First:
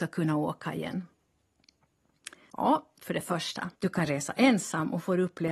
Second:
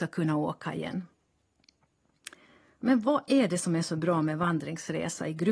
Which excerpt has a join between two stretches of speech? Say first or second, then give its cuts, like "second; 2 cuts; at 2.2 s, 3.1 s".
first; 2 cuts; at 2.5 s, 3.8 s